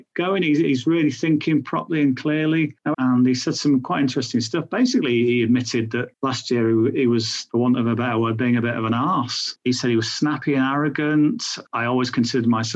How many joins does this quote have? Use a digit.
1